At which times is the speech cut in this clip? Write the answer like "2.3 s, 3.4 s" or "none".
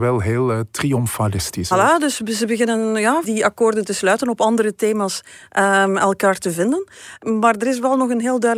1.7 s, 3.2 s